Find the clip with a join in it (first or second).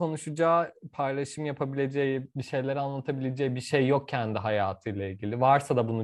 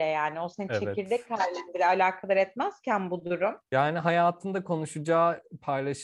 second